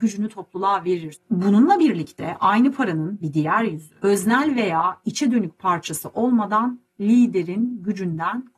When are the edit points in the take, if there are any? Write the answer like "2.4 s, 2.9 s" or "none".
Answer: 1.1 s, 4.0 s